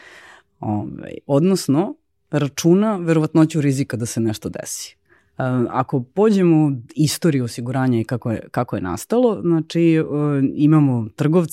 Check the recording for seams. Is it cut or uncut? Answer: uncut